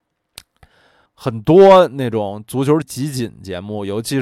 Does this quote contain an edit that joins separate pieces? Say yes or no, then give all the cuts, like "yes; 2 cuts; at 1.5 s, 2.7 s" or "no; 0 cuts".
yes; 2 cuts; at 1.1 s, 2.8 s